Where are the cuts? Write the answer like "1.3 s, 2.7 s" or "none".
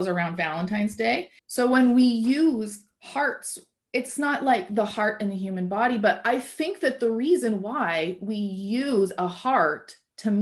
1.4 s